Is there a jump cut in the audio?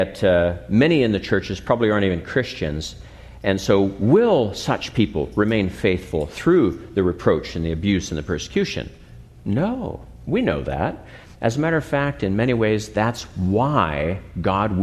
no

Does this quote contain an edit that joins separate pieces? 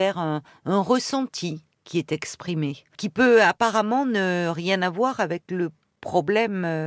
yes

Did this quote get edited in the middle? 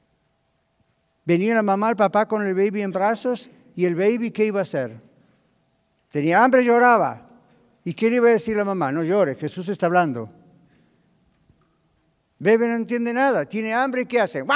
no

